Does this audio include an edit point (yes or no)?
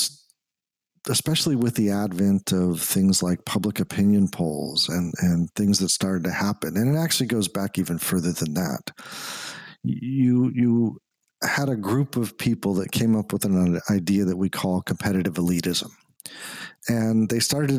no